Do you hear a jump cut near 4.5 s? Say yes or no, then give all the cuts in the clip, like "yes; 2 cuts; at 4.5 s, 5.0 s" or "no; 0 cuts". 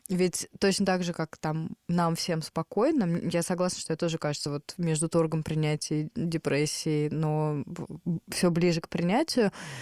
no; 0 cuts